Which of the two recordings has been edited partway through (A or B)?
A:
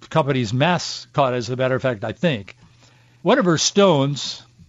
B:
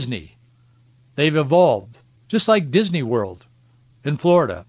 A